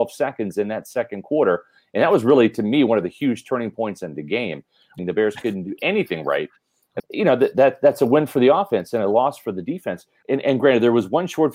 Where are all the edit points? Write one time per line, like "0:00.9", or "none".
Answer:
0:05.0
0:07.0
0:10.2